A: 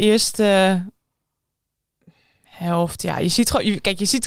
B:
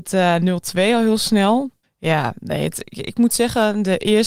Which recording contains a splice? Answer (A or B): B